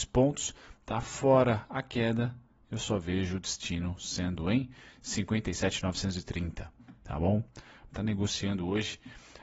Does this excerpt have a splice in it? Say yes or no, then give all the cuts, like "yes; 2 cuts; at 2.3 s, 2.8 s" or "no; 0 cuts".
yes; 1 cut; at 7.9 s